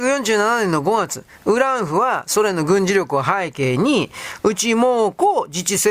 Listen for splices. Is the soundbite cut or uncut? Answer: uncut